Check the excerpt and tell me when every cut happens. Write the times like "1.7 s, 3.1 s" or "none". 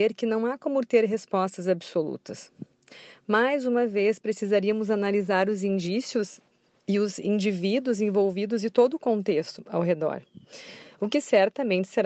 none